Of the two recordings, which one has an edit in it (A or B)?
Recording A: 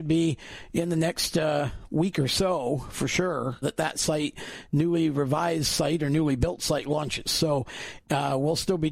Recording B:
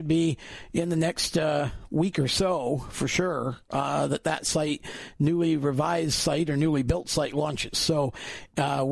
A